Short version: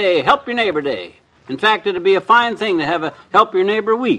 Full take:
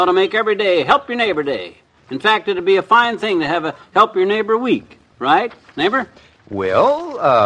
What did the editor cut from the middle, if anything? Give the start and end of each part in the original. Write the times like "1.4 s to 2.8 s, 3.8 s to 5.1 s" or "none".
none

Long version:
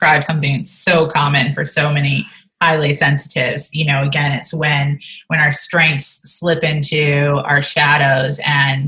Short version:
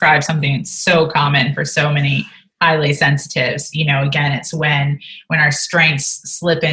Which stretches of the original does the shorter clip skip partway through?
none

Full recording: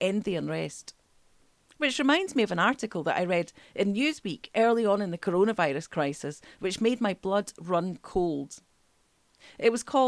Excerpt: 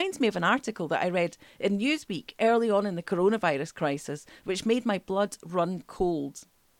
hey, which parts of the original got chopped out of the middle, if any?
none

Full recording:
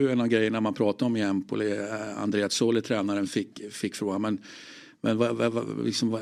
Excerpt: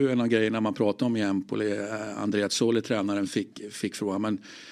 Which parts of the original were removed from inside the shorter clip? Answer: none

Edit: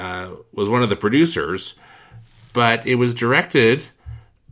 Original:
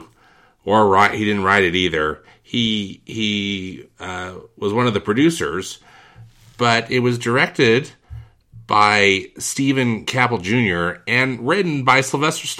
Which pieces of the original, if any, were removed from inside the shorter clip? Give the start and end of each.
none

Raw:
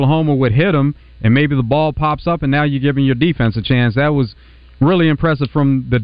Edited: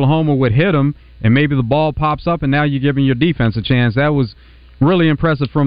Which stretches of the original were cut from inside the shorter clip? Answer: none

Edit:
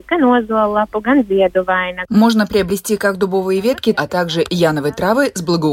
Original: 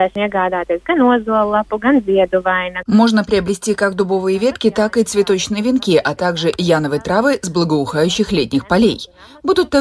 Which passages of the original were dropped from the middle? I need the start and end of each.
4.7 s to 6.0 s

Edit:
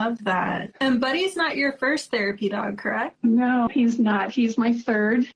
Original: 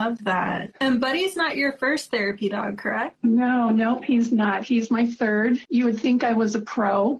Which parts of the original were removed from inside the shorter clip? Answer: 3.7 s to 4.0 s

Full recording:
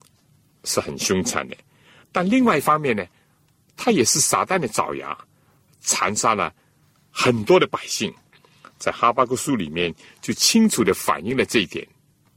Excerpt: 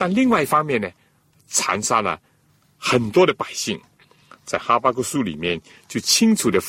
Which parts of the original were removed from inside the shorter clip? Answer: 3.5 s to 5.7 s

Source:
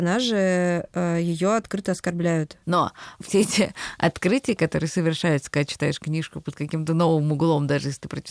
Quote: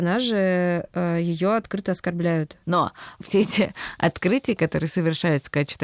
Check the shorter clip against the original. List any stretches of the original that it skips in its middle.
none

